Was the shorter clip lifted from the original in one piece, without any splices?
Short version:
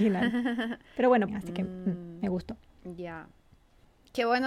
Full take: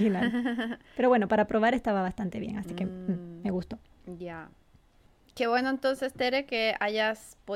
no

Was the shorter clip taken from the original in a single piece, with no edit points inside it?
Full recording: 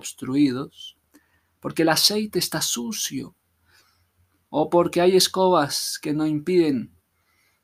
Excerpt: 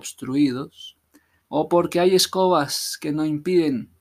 no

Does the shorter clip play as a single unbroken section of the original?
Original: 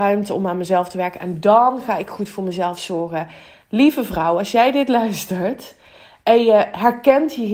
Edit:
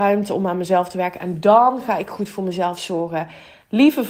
yes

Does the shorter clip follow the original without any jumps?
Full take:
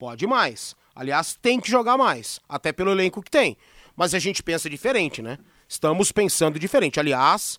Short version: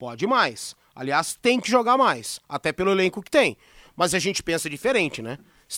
yes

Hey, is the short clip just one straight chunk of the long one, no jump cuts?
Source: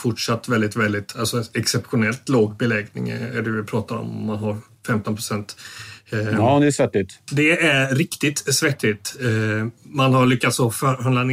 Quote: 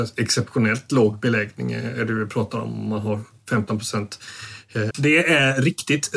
no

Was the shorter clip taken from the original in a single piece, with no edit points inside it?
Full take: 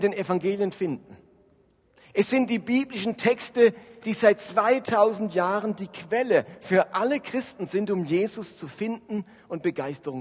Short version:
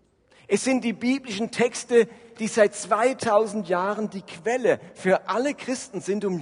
yes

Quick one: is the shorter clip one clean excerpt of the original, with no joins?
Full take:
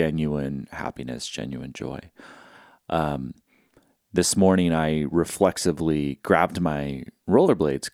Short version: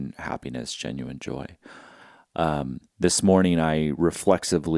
no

